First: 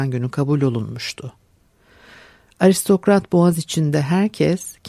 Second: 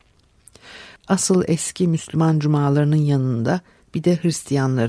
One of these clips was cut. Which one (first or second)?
second